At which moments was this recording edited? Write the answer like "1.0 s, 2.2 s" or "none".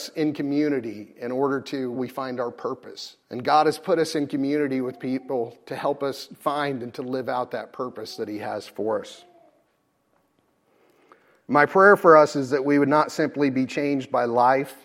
1.9 s, 3.2 s